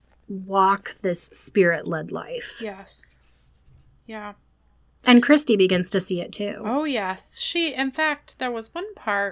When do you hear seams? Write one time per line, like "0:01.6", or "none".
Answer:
none